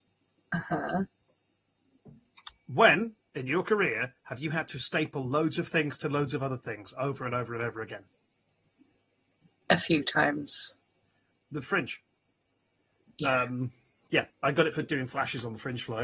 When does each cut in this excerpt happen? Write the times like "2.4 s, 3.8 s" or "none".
none